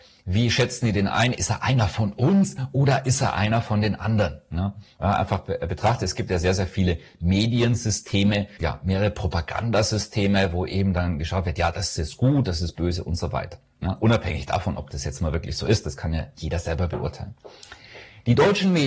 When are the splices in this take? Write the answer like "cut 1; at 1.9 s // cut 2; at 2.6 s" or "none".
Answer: cut 1; at 8.6 s